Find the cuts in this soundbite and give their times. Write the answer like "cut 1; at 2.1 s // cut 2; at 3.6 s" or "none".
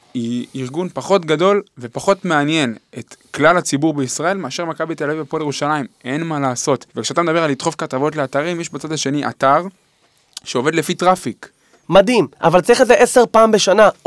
cut 1; at 6.9 s // cut 2; at 11.8 s